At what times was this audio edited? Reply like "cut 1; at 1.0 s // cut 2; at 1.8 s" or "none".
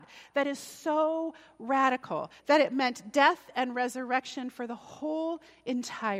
cut 1; at 2.4 s